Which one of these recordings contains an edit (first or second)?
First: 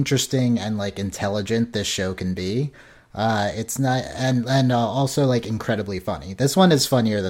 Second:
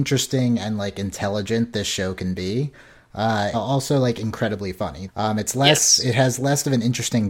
second